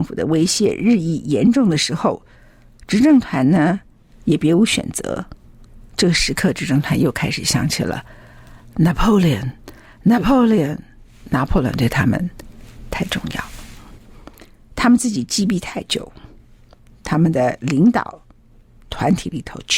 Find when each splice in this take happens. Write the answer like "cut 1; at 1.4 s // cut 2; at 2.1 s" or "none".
none